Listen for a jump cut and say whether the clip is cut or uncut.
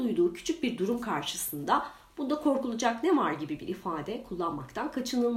uncut